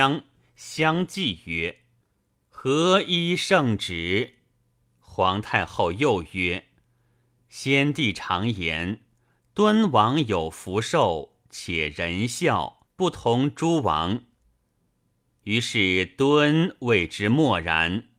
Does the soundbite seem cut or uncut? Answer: cut